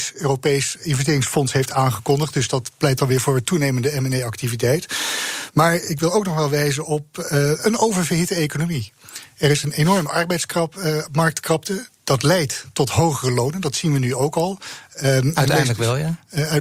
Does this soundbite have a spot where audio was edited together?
no; 0 cuts

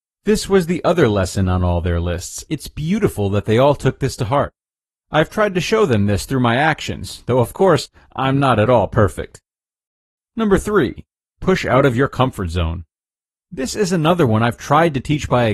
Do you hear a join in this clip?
yes; 1 cut; at 2.5 s

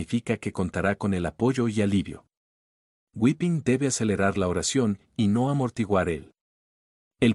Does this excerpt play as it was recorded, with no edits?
yes; 0 cuts

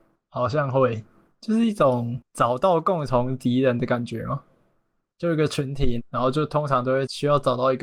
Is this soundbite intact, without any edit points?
no; 1 cut; at 6.0 s

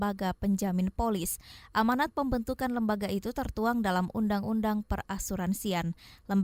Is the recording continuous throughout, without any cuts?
yes; 0 cuts

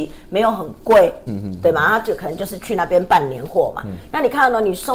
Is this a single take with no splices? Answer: no; 1 cut; at 1.3 s

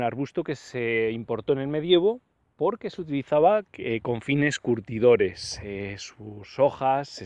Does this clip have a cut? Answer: no; 0 cuts

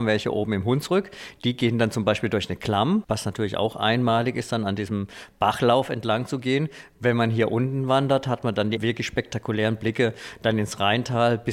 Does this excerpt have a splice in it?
no; 0 cuts

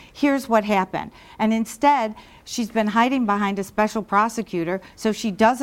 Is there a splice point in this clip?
no; 0 cuts

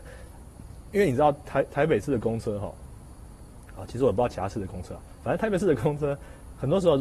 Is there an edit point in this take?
no; 0 cuts

